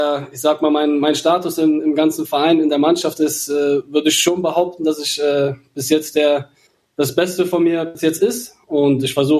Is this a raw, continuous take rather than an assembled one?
yes; 0 cuts

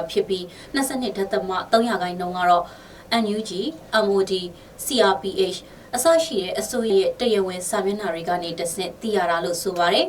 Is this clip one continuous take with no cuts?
no; 1 cut; at 6.9 s

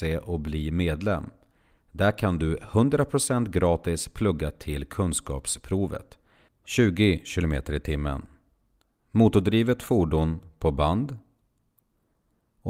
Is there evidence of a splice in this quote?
yes; 1 cut; at 6.5 s

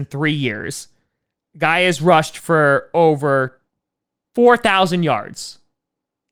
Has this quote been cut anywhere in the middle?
no; 0 cuts

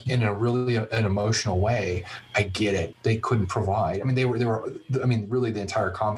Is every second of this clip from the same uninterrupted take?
no; 1 cut; at 2.9 s

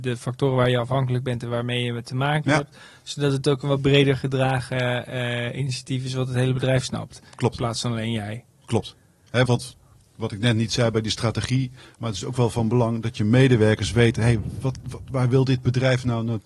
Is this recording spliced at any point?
yes; 1 cut; at 9.5 s

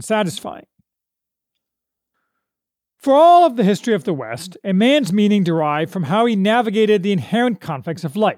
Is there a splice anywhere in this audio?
no; 0 cuts

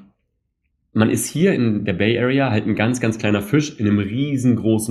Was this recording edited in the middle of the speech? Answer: no; 0 cuts

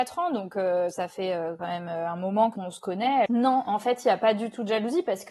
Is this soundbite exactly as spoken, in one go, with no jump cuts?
no; 1 cut; at 3.3 s

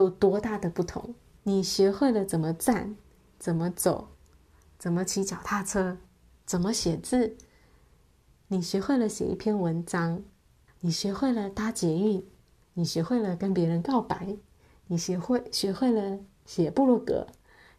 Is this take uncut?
no; 3 cuts; at 1.4 s, 10.7 s, 12.6 s

